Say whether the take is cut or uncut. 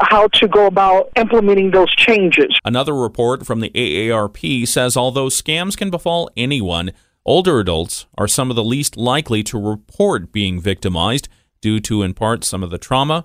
cut